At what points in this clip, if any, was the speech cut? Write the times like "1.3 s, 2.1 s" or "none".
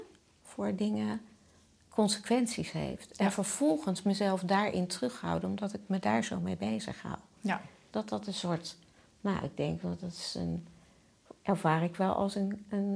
7.9 s